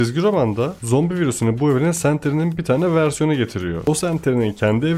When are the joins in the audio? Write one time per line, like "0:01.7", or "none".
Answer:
none